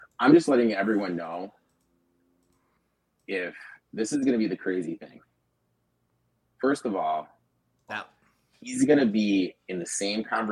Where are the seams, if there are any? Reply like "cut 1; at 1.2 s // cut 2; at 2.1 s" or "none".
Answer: cut 1; at 7.9 s